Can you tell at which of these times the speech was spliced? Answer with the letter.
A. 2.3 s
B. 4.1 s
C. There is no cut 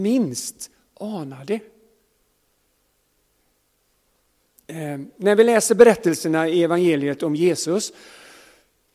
C